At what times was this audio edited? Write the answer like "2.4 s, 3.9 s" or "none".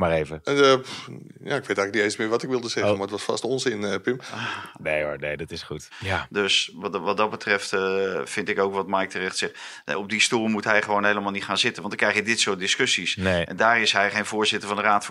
5.9 s